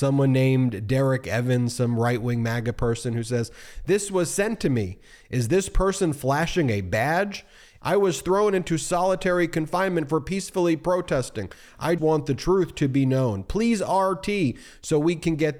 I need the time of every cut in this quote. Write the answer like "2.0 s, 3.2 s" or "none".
7.8 s, 12.0 s